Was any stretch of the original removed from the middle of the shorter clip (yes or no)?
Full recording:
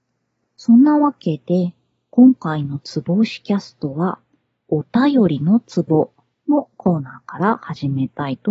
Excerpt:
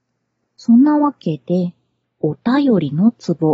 yes